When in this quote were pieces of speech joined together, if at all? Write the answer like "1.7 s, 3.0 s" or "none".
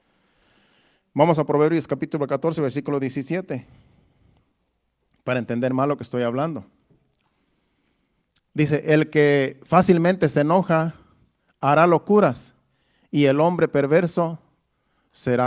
none